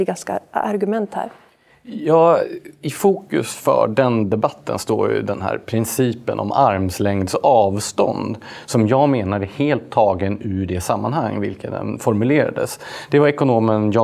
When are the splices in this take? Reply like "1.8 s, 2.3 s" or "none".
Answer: none